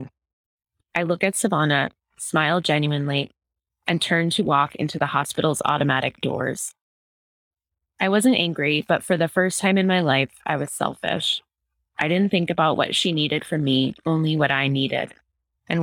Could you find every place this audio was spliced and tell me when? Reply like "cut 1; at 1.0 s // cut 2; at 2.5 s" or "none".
none